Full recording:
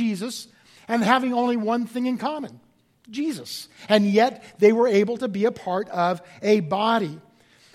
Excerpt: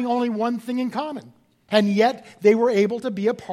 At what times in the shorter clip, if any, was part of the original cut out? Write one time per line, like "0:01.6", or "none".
0:01.7